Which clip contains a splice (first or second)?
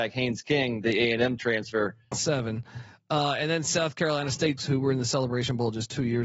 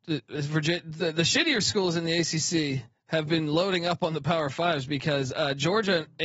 first